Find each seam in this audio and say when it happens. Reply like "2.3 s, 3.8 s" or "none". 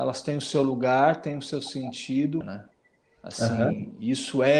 2.4 s